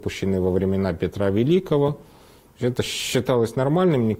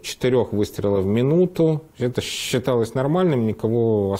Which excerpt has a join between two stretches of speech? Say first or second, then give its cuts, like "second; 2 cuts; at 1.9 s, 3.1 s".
second; 1 cut; at 1.9 s